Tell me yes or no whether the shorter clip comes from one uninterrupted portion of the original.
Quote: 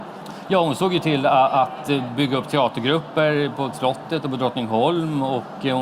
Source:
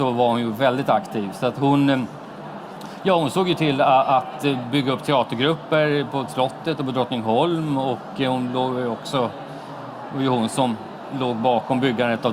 yes